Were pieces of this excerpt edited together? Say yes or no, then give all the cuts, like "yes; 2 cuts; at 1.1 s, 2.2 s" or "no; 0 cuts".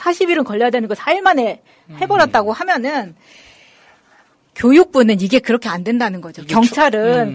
no; 0 cuts